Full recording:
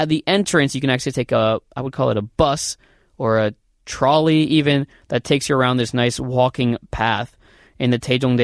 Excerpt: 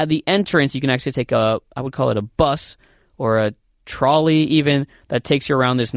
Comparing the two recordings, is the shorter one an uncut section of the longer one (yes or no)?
yes